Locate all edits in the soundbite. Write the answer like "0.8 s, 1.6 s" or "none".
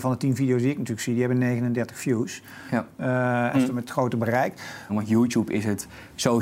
3.5 s, 4.9 s